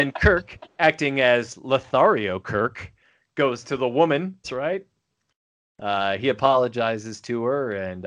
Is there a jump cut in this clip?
yes; 1 cut; at 4.4 s

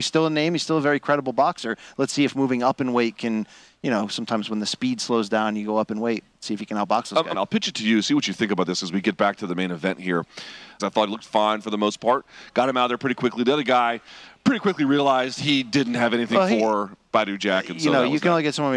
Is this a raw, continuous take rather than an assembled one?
no; 2 cuts; at 7.3 s, 10.8 s

